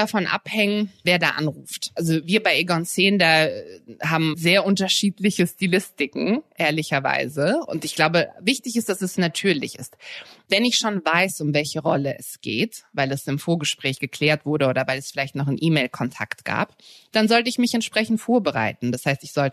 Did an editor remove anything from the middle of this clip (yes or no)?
yes